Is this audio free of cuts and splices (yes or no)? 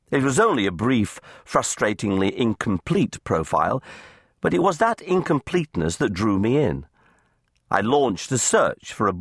yes